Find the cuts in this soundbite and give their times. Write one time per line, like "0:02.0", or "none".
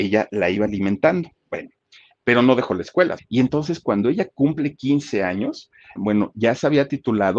0:03.2
0:06.0